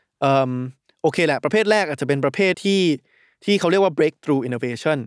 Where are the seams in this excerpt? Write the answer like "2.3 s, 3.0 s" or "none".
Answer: 2.5 s